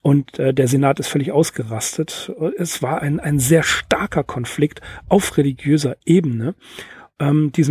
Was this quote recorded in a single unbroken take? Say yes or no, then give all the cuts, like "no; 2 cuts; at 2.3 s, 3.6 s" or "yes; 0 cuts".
no; 1 cut; at 3.0 s